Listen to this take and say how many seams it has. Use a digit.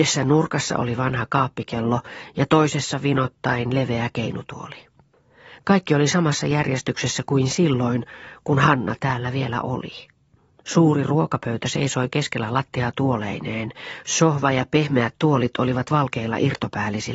1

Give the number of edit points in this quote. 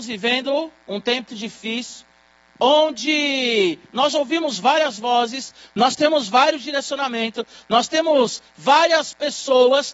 1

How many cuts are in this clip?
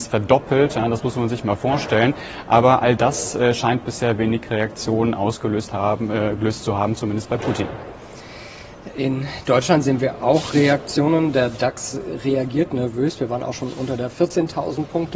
0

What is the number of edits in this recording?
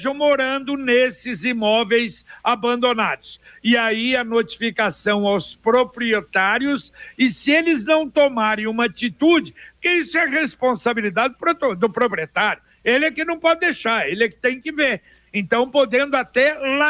0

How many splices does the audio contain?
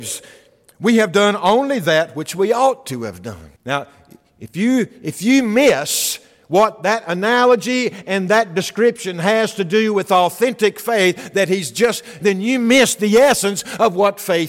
2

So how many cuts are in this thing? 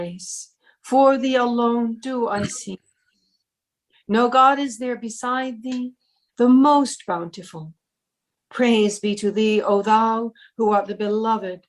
1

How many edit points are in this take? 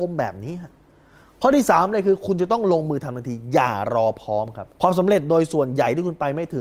1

